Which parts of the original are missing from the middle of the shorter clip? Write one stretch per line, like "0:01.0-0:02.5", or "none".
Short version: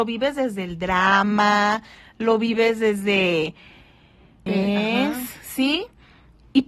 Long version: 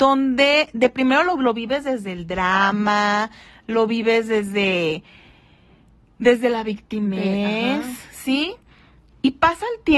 0:05.9-0:07.2